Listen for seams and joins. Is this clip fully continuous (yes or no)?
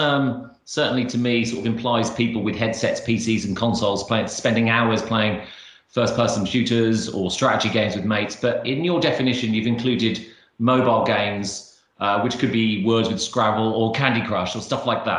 yes